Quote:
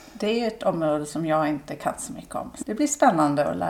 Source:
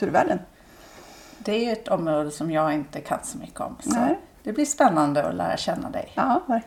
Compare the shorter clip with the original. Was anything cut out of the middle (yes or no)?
yes